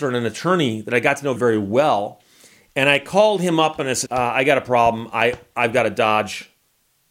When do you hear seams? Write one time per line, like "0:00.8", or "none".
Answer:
0:01.4
0:04.1